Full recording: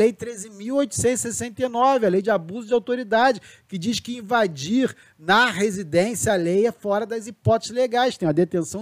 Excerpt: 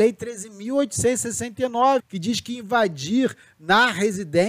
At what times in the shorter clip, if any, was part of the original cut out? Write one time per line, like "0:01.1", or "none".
0:02.0

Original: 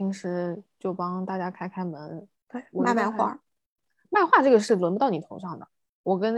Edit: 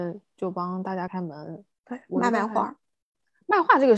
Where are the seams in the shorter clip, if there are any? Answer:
0:01.1

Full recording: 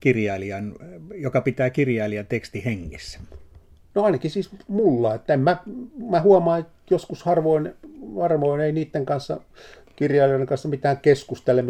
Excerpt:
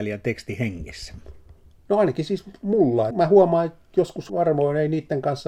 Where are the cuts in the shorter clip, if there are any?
0:03.1
0:04.3

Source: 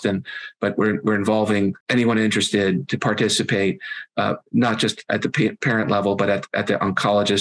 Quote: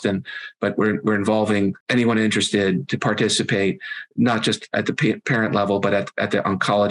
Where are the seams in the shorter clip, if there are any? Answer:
0:04.1

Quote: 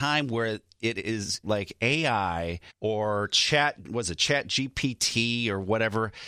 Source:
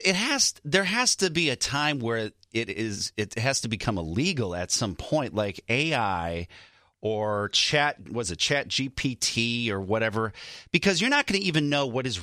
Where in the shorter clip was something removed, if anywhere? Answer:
0:01.4
0:02.7

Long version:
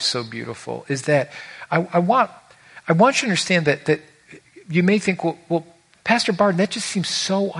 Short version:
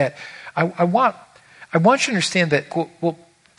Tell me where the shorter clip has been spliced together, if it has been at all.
0:02.7

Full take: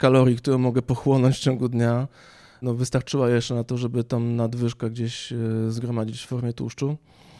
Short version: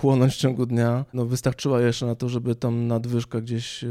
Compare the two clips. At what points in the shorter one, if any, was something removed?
0:01.1

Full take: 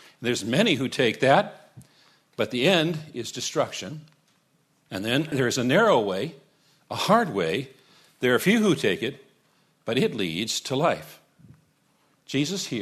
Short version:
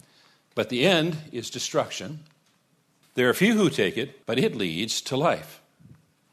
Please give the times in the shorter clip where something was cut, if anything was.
0:03.0
0:04.2

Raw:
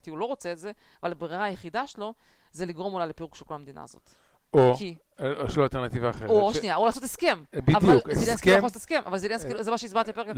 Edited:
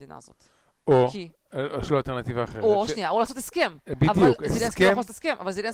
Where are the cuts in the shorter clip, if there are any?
none

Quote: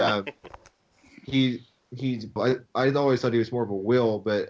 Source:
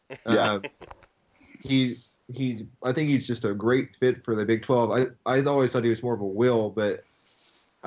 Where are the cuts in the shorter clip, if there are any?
0:02.4

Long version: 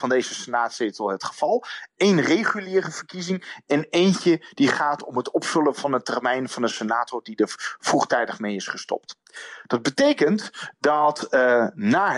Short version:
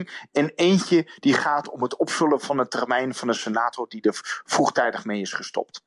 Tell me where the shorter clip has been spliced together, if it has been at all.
none

